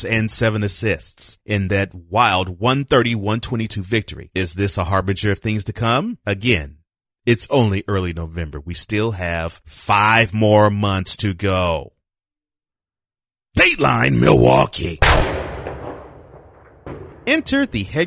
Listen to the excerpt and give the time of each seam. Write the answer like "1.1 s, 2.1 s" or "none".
none